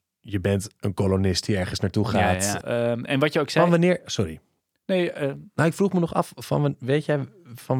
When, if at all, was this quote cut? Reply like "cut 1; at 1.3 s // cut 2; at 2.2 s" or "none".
cut 1; at 2.6 s